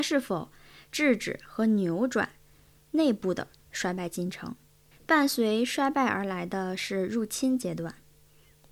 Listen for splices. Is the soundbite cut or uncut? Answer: cut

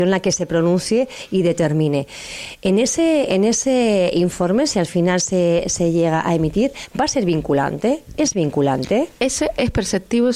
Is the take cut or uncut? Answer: uncut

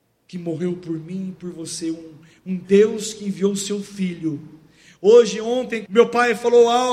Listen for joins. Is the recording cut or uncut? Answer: cut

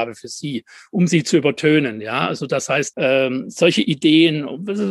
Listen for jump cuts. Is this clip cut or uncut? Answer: cut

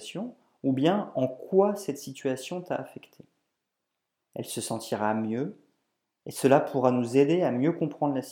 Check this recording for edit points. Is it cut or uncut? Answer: cut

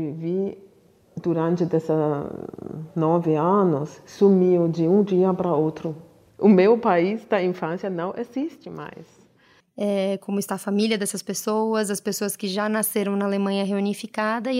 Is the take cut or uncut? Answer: cut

